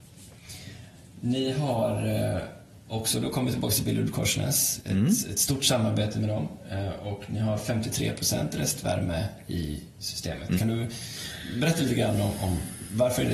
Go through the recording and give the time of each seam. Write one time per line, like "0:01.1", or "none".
0:10.6